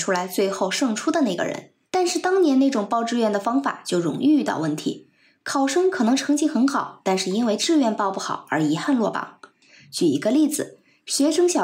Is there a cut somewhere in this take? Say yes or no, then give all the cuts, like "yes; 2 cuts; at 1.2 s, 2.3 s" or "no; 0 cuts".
yes; 1 cut; at 1.8 s